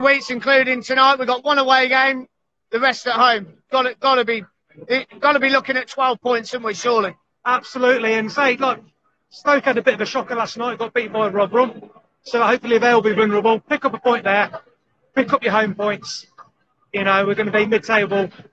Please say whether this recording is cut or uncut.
uncut